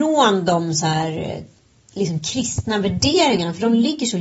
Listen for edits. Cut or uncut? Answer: uncut